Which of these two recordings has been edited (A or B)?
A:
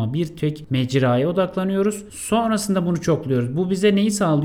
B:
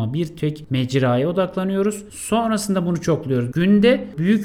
B